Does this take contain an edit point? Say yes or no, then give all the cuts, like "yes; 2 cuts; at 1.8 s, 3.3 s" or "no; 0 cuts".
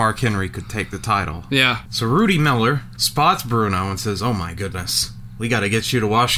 yes; 2 cuts; at 1.5 s, 3.0 s